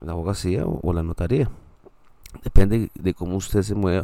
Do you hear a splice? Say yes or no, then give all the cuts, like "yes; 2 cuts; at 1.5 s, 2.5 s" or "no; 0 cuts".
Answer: no; 0 cuts